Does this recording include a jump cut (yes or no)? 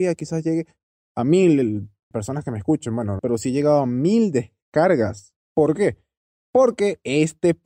yes